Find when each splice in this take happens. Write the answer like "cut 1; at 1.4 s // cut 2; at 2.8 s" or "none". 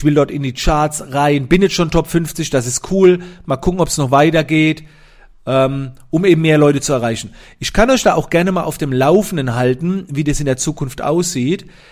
none